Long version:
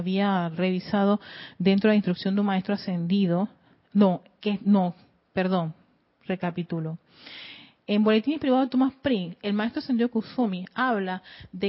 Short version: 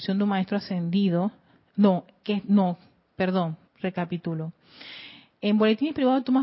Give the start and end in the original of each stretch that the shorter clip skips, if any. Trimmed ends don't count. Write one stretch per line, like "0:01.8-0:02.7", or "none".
0:05.8-0:06.1